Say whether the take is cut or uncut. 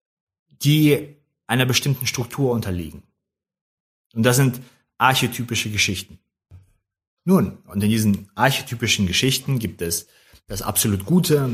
uncut